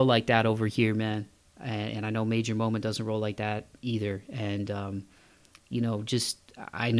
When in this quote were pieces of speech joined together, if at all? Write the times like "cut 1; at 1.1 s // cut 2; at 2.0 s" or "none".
none